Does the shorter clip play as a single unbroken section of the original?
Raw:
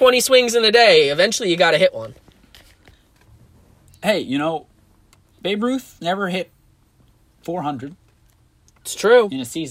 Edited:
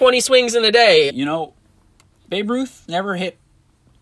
no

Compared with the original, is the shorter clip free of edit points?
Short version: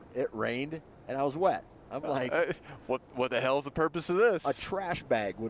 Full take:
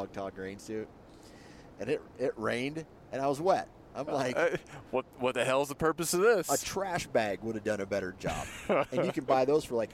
yes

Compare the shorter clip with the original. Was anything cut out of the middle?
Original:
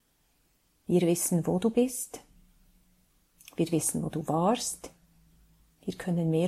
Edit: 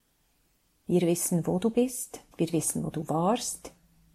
yes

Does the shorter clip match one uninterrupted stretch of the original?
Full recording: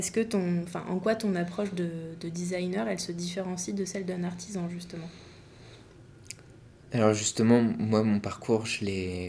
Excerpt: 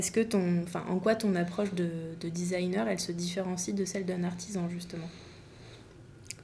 yes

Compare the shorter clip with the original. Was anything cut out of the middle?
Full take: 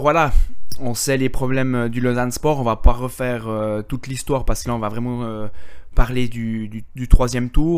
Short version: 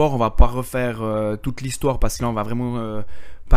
no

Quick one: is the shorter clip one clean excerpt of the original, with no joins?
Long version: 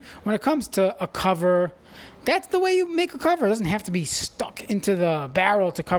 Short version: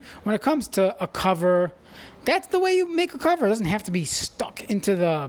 yes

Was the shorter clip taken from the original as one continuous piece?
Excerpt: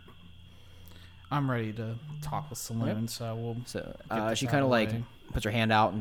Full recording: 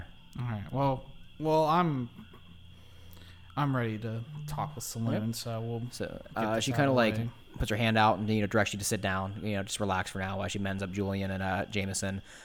yes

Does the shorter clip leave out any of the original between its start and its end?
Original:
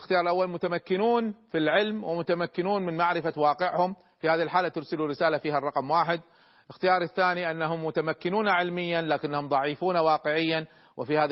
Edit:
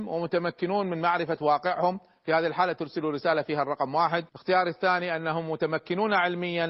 yes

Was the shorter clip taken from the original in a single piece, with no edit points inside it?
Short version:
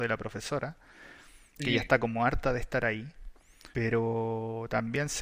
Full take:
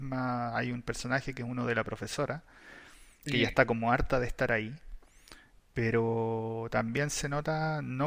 no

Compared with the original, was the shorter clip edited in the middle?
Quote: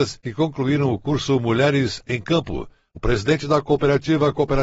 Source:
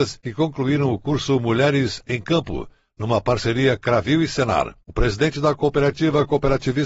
yes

